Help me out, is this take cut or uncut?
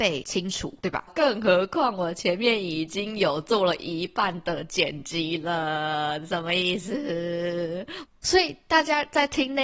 cut